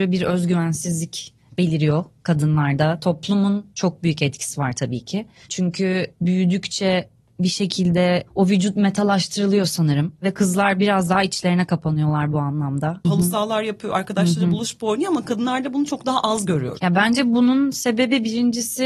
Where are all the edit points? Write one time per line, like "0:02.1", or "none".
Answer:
0:13.0
0:16.8